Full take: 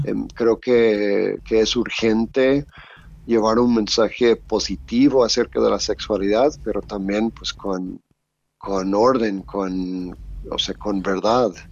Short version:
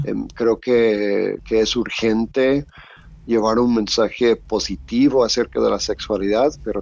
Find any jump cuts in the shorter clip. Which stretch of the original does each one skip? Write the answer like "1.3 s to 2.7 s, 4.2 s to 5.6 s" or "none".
none